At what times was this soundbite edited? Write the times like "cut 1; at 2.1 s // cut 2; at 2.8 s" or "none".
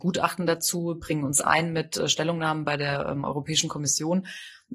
none